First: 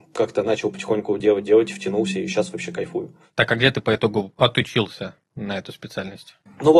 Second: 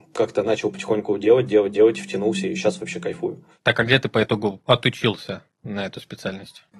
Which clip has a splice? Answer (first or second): first